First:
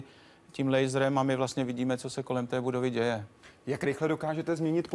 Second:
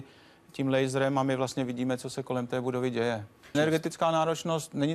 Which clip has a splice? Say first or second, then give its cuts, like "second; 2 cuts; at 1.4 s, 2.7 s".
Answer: second; 1 cut; at 3.5 s